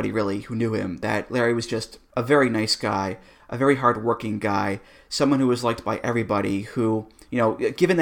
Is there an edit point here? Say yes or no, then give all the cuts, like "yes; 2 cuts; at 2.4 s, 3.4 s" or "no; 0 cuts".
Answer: no; 0 cuts